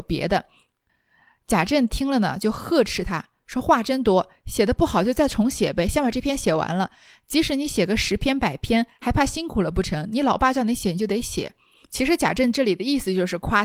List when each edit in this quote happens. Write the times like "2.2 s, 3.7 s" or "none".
none